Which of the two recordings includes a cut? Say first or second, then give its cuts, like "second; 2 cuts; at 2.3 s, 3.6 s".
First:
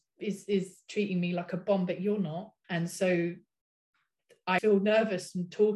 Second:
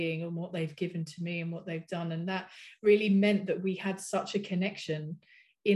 first; 2 cuts; at 2.6 s, 4.6 s